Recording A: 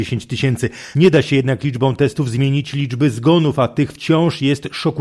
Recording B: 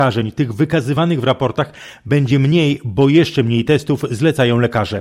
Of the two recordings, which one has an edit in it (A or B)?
A